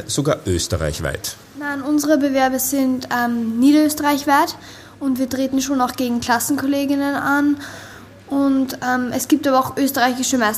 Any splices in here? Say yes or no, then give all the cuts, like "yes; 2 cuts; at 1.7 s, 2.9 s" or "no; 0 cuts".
no; 0 cuts